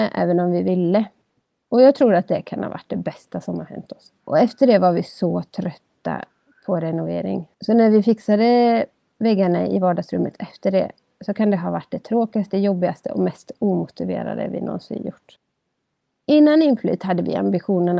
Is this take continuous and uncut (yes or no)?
no